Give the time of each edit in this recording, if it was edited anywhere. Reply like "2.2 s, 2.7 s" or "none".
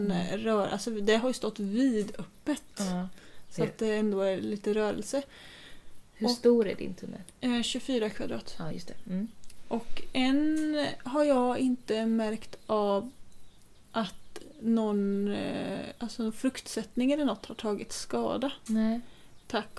none